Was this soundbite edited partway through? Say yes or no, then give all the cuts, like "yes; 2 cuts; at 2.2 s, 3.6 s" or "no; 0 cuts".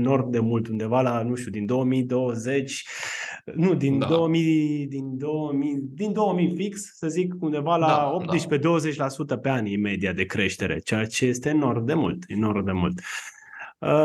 no; 0 cuts